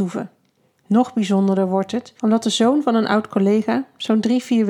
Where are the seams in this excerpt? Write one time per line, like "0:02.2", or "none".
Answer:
0:02.2